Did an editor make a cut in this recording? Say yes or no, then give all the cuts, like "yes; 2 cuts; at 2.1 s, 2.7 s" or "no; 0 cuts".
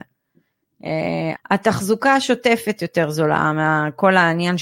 yes; 1 cut; at 1.4 s